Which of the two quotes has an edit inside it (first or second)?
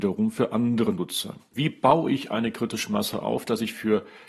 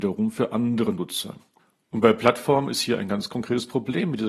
first